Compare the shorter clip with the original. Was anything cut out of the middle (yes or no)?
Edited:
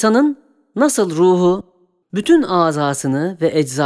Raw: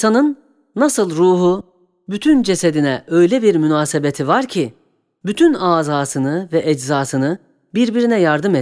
yes